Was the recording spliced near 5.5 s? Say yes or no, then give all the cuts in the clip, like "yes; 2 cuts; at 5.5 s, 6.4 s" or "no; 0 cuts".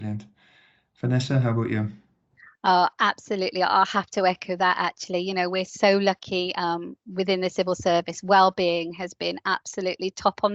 no; 1 cut; at 7.0 s